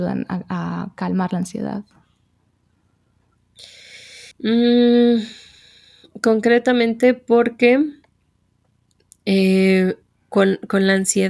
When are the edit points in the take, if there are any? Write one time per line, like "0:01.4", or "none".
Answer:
0:04.3